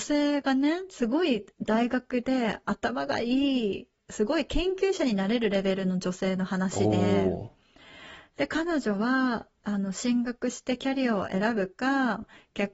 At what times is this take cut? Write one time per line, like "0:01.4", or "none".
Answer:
none